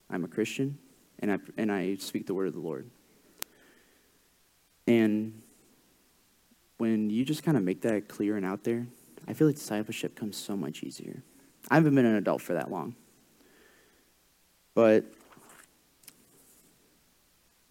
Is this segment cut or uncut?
cut